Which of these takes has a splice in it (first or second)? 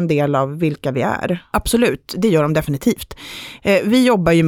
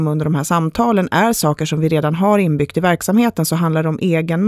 first